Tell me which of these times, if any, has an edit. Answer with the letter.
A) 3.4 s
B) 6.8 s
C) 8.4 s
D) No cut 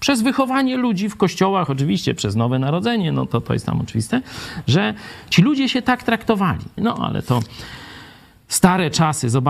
B